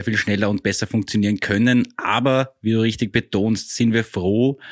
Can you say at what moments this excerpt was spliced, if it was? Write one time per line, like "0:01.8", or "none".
none